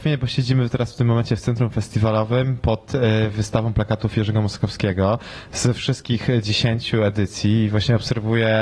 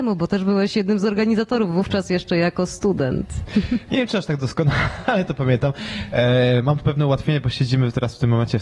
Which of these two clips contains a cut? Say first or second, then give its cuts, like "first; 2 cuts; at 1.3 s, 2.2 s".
second; 1 cut; at 3.9 s